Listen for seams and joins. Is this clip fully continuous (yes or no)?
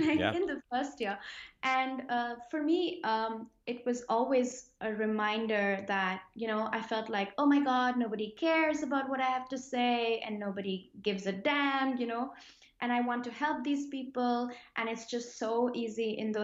yes